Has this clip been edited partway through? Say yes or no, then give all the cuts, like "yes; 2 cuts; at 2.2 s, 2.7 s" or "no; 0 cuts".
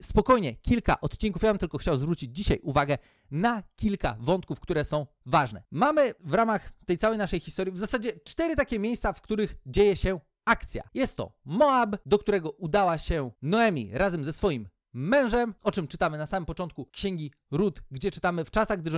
no; 0 cuts